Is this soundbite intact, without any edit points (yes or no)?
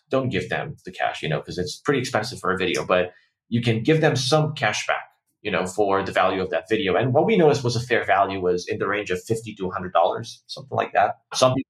yes